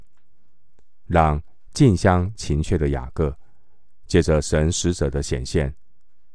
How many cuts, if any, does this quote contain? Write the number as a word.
zero